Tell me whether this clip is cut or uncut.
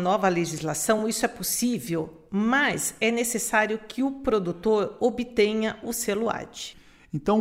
uncut